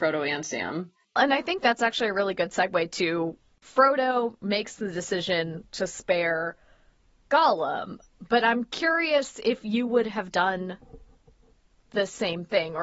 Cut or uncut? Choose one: cut